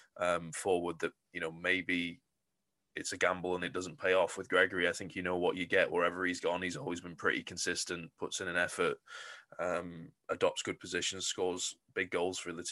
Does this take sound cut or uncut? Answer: uncut